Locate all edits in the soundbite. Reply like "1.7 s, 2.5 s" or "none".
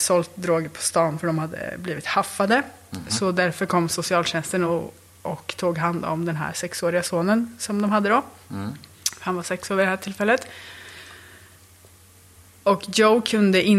none